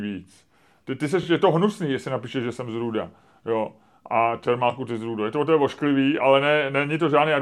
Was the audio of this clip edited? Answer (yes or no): no